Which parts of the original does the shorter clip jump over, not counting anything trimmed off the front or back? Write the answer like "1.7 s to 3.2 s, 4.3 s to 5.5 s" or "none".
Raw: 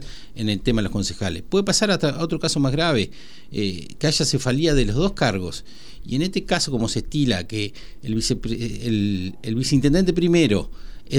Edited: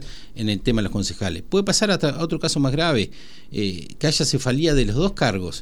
none